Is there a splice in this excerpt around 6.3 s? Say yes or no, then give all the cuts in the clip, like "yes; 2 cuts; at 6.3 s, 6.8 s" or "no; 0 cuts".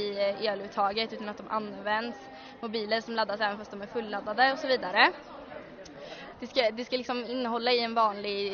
yes; 1 cut; at 6.3 s